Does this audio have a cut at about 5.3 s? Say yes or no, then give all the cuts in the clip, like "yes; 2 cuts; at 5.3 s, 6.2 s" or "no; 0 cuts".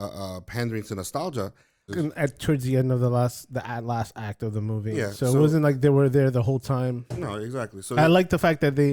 no; 1 cut; at 1.9 s